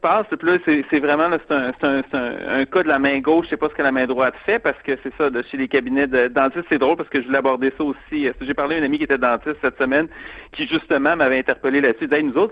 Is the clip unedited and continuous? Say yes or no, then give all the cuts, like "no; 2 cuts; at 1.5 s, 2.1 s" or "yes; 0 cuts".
yes; 0 cuts